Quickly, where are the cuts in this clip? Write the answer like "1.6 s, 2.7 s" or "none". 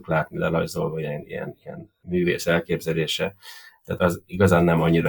4.0 s